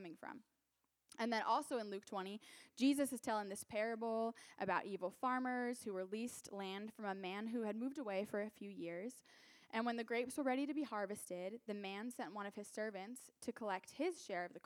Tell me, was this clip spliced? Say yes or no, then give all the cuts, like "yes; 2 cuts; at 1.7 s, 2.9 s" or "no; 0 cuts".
no; 0 cuts